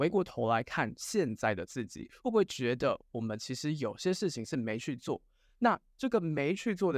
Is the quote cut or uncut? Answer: uncut